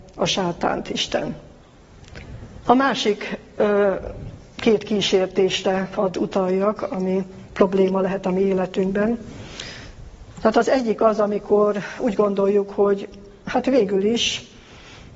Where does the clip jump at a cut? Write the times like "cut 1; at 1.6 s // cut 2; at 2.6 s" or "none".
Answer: cut 1; at 2.7 s